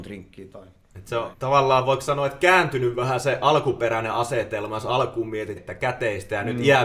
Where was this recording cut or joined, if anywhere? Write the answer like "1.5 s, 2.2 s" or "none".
1.3 s, 5.6 s